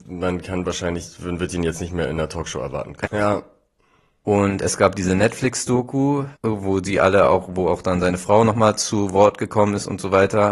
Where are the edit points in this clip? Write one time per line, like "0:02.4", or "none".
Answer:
0:03.0
0:06.3